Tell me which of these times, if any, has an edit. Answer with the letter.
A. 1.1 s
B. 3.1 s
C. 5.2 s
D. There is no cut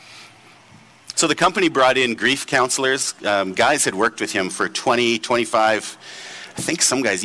A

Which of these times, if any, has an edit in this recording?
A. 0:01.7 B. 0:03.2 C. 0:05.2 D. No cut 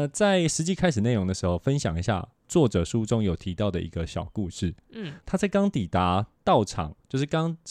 C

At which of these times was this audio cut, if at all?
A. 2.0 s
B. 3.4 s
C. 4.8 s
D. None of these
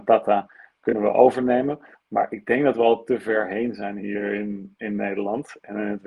C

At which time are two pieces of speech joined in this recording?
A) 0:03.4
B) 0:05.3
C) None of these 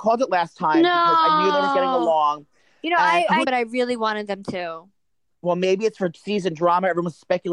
A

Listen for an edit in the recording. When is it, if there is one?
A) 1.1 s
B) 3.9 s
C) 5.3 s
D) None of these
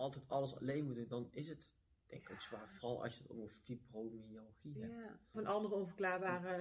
C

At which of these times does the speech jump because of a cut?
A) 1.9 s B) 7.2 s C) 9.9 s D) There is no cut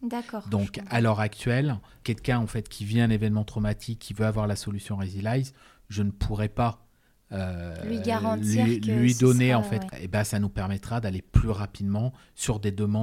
C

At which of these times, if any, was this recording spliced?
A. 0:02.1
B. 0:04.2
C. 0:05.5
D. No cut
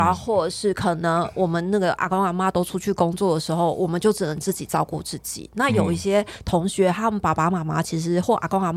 D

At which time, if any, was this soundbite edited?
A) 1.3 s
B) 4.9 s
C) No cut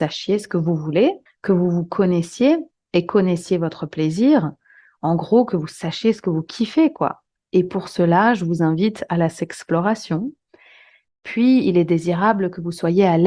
A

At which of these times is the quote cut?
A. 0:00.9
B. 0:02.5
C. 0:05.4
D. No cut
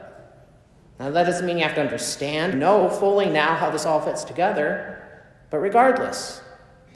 B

